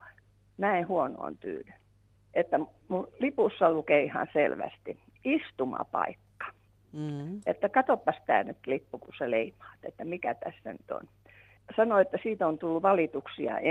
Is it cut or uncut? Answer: uncut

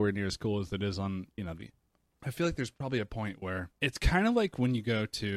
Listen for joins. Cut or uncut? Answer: cut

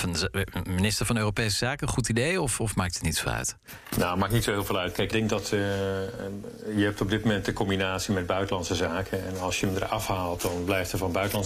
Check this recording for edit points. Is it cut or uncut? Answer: cut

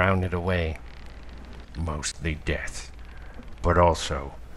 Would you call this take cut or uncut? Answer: uncut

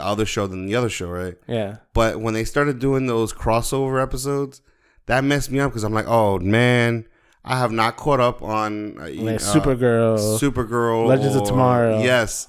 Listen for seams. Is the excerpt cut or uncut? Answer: uncut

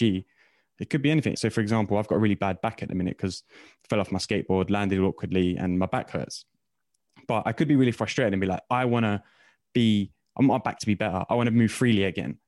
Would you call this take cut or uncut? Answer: cut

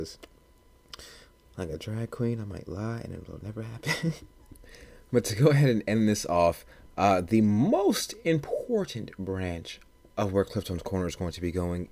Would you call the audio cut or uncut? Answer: uncut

